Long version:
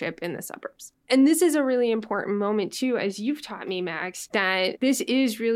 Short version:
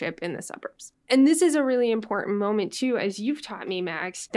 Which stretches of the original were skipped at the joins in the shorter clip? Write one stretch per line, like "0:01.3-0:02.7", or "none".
none